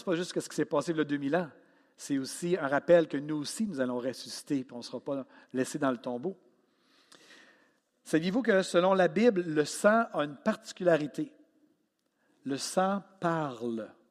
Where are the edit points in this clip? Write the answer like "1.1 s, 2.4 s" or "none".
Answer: none